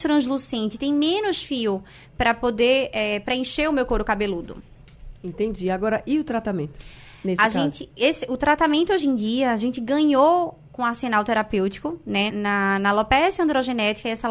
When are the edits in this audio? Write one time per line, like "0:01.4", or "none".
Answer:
0:12.3